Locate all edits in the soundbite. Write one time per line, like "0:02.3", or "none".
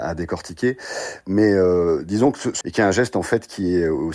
0:02.6